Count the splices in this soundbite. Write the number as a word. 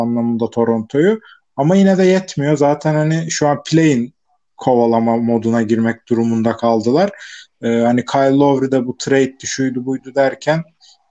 zero